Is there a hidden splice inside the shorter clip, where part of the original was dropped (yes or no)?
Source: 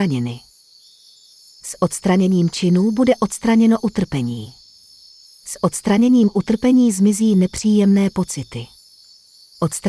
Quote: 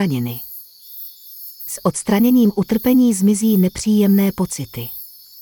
yes